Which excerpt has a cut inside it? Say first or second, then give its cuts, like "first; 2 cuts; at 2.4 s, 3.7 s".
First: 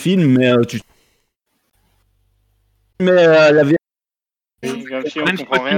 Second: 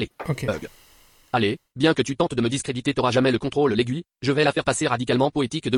first; 1 cut; at 4.6 s